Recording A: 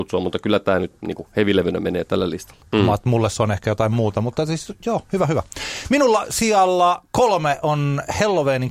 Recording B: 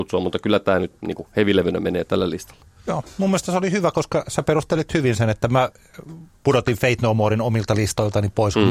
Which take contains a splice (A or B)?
A